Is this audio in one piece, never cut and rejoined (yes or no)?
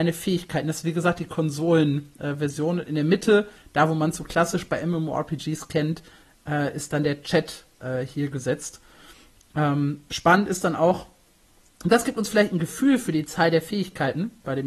yes